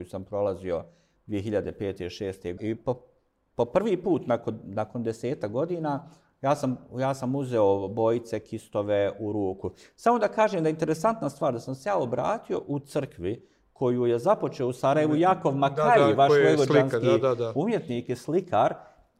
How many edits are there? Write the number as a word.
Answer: one